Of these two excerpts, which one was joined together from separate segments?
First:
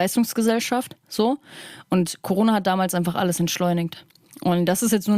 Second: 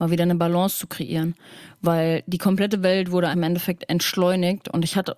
second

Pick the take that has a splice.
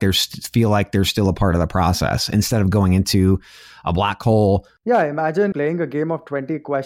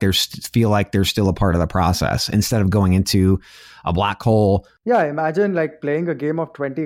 first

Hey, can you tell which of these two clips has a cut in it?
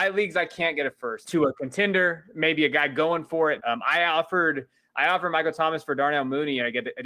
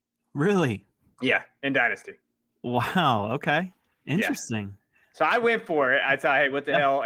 first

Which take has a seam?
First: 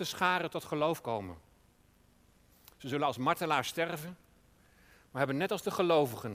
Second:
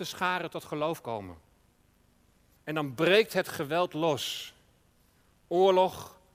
second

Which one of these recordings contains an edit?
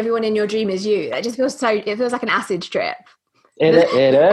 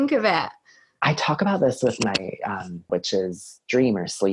second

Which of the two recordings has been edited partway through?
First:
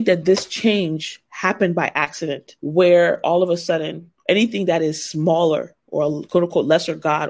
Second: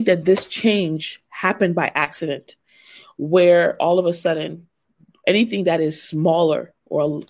first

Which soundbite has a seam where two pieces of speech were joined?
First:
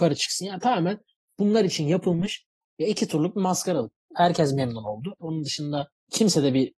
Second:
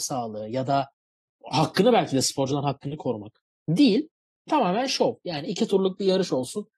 first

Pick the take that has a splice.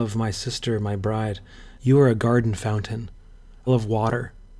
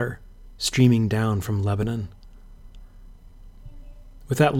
first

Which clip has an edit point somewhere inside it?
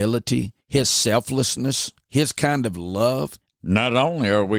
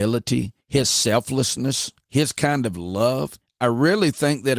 first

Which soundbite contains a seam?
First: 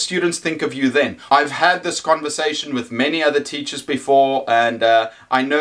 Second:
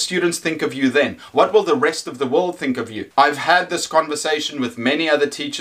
first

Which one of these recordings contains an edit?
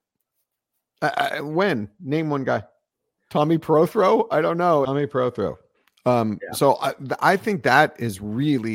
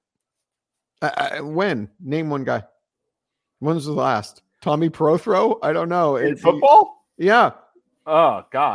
first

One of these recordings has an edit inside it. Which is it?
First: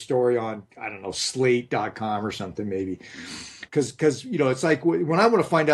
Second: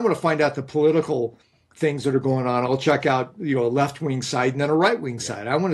first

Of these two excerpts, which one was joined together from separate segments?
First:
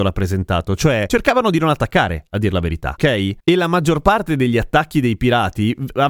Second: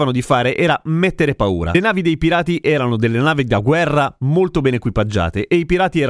first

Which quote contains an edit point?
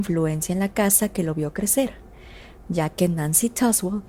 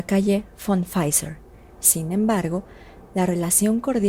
second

